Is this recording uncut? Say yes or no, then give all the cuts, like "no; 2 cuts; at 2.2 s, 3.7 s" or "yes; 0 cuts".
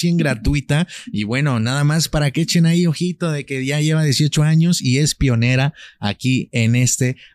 yes; 0 cuts